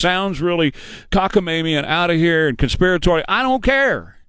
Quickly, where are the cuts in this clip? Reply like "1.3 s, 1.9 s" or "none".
1.1 s